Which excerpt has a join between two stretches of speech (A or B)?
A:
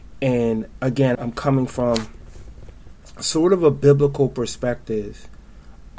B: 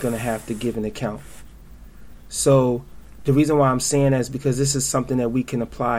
A